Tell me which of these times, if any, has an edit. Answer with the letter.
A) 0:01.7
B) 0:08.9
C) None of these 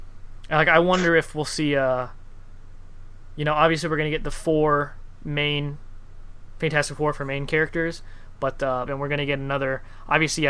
B